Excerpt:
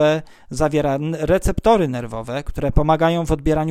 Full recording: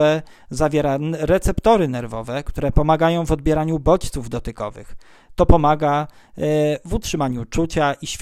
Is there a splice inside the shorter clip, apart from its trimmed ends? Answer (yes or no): no